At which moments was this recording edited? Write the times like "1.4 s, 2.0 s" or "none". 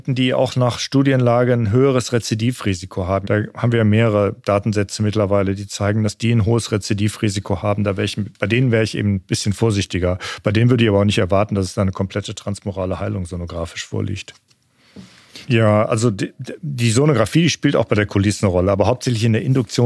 3.2 s, 15.5 s